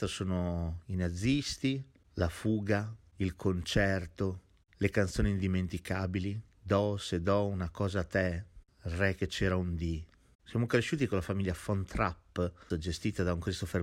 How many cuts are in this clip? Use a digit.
3